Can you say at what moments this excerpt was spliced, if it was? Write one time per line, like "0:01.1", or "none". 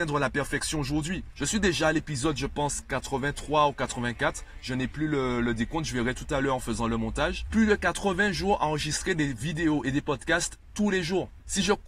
0:07.5